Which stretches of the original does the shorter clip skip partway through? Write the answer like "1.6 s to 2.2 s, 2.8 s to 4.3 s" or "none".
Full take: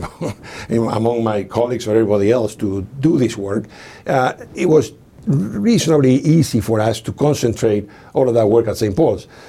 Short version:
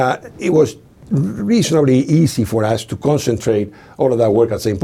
none